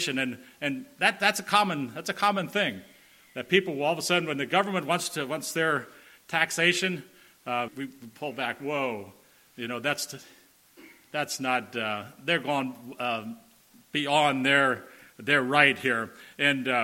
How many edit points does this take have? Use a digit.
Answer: 1